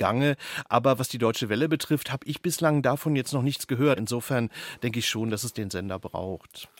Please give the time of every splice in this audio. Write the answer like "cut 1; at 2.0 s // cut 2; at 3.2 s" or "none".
cut 1; at 4.0 s